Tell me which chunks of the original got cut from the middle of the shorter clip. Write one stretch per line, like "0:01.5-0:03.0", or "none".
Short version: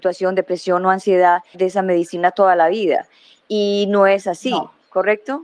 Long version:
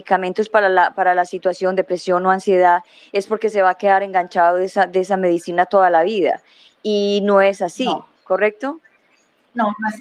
0:02.9-0:04.9